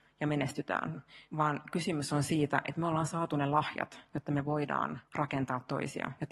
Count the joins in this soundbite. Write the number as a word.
one